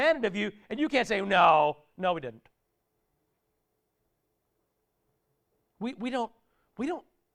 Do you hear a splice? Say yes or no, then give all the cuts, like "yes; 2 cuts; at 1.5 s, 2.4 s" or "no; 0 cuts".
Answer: no; 0 cuts